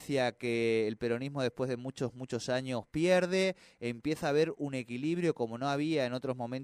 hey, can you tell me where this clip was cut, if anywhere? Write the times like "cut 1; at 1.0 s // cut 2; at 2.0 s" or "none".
none